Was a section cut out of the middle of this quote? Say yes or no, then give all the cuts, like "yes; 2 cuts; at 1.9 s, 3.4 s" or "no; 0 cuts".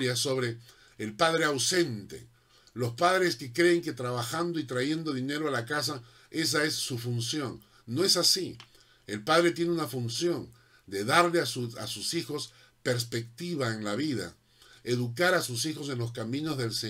no; 0 cuts